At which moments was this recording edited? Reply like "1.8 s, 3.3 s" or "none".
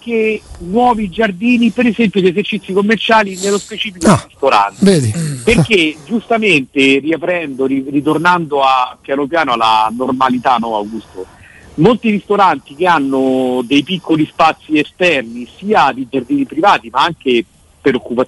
none